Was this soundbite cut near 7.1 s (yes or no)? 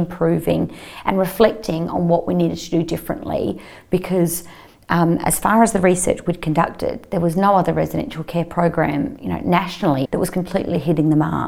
no